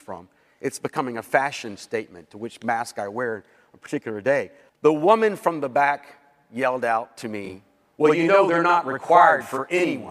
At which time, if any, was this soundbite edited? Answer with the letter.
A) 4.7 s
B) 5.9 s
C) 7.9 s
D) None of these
A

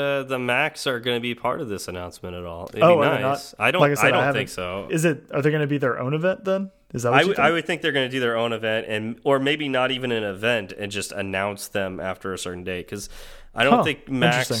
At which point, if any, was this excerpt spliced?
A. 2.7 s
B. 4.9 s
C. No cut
B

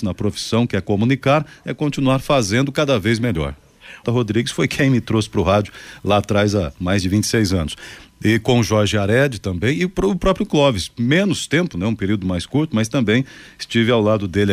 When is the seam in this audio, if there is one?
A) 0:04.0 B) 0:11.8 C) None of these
A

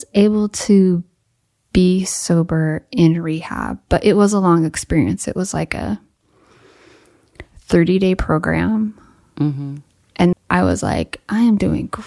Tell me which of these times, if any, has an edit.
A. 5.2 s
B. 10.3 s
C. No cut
B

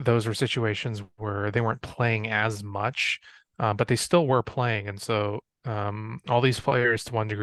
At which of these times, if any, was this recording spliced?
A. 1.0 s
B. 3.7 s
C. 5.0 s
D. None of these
D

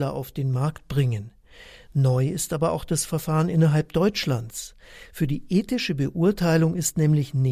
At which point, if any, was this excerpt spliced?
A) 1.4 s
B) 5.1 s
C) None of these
C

